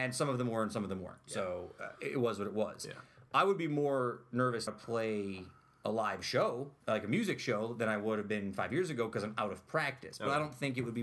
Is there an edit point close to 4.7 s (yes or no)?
yes